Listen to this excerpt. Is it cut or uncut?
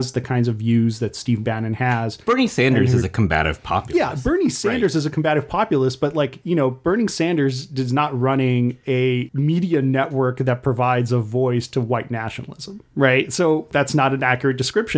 uncut